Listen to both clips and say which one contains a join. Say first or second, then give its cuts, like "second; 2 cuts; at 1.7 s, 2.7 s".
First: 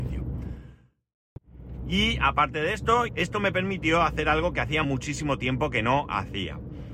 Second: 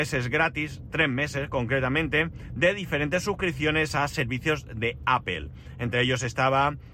first; 2 cuts; at 3.1 s, 4.8 s